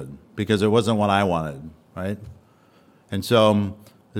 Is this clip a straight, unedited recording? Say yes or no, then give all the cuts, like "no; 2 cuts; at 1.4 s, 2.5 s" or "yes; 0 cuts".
yes; 0 cuts